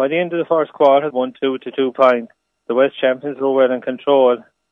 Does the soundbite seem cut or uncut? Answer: cut